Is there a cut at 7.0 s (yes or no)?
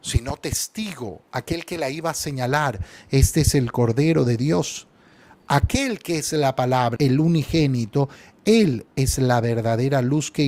yes